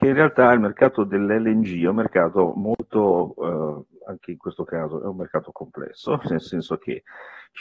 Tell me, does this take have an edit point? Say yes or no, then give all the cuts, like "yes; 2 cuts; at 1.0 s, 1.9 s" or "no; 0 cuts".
no; 0 cuts